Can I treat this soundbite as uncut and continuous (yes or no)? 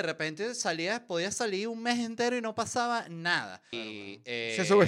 no